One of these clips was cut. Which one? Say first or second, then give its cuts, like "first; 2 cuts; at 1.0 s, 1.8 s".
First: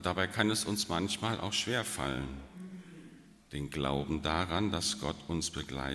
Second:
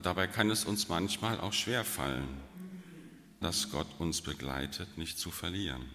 second; 1 cut; at 3.4 s